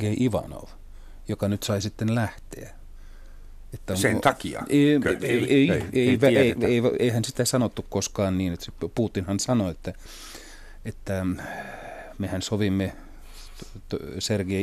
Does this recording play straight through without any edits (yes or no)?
yes